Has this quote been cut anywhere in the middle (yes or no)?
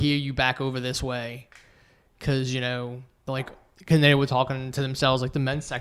no